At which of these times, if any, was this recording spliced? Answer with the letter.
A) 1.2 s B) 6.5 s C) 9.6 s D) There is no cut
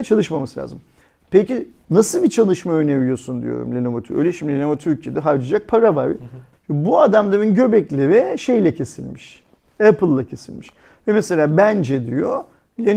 B